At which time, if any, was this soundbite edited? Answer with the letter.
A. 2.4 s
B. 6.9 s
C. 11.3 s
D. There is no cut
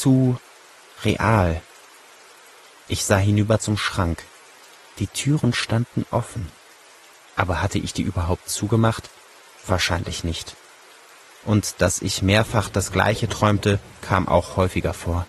D